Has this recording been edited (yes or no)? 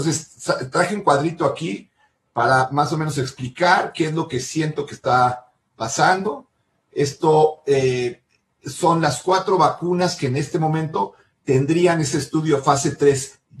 no